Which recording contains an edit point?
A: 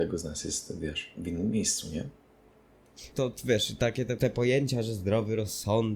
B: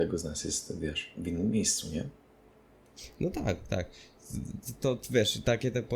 A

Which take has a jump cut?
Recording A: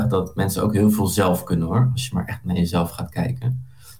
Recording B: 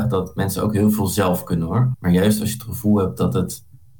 B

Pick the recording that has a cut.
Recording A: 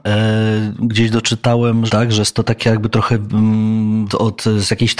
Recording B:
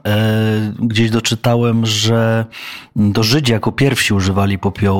A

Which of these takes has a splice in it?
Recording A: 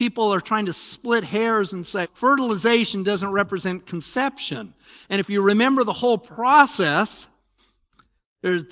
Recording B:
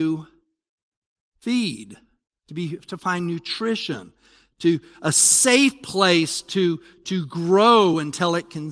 A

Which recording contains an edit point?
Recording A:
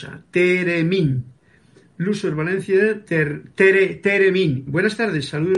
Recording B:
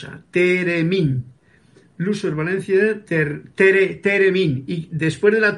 A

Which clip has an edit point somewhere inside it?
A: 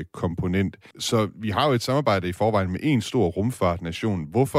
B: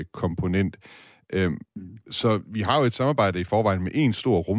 A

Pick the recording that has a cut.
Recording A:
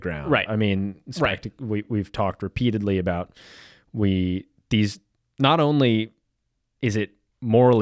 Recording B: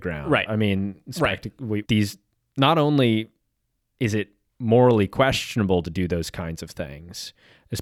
B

